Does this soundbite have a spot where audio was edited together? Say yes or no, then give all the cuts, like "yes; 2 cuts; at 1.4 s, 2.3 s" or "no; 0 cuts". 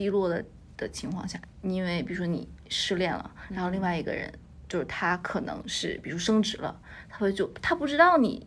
yes; 1 cut; at 1.4 s